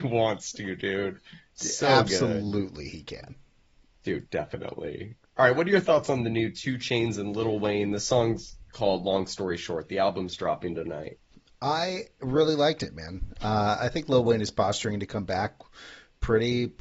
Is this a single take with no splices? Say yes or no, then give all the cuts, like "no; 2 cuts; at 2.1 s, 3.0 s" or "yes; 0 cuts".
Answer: yes; 0 cuts